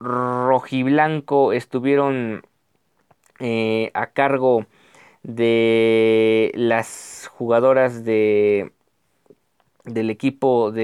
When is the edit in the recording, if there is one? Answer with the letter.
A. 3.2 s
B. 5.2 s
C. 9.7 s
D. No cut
D